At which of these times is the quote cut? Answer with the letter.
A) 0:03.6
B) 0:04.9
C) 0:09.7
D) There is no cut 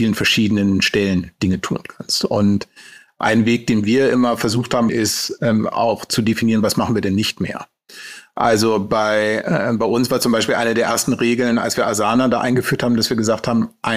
B